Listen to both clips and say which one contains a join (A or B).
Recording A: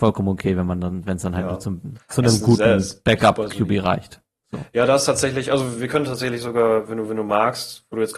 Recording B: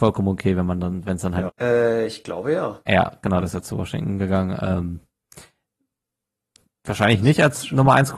B